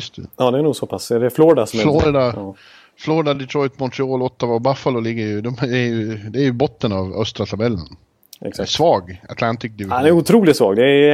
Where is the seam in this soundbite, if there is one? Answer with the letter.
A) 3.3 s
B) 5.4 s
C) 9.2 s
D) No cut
D